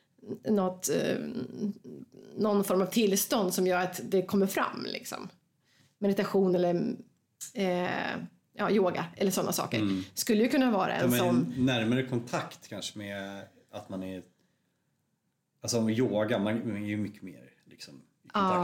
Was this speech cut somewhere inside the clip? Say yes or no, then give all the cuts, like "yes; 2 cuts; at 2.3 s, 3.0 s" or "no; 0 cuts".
no; 0 cuts